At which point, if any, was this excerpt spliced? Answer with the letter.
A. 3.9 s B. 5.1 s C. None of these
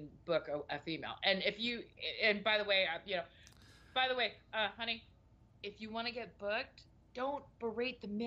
C